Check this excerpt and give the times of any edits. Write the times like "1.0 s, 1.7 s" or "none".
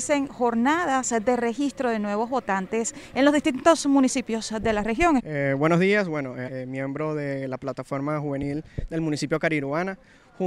5.2 s, 6.5 s